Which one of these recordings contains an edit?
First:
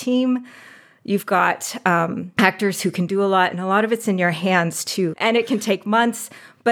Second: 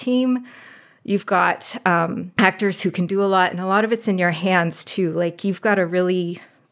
first; 1 cut; at 5.1 s

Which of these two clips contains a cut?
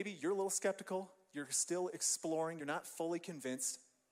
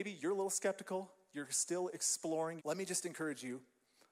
second; 1 cut; at 2.6 s

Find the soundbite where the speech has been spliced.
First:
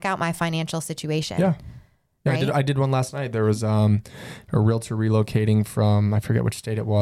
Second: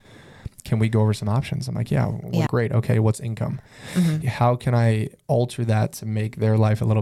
second; 2 cuts; at 2.5 s, 4.2 s

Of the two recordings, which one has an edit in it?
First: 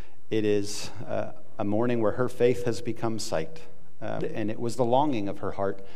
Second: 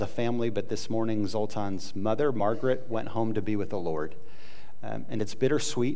first; 1 cut; at 4.2 s

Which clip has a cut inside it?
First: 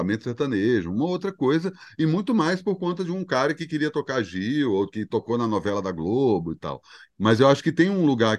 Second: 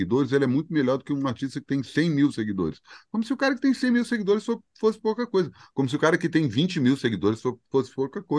first; 1 cut; at 7.1 s

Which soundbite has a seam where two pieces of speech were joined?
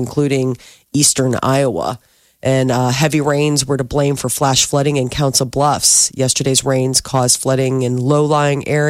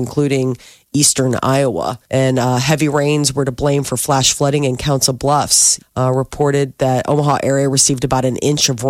second; 2 cuts; at 2.0 s, 5.8 s

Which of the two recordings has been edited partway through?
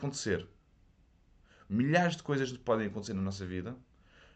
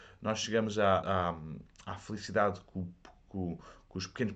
second; 1 cut; at 1.0 s

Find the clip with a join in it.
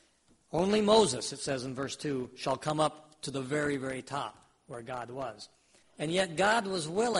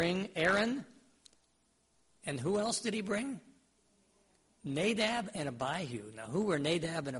first; 1 cut; at 5.8 s

